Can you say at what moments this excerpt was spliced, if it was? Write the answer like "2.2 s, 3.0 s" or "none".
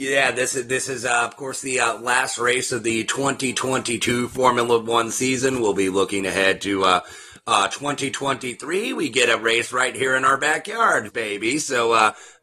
11.1 s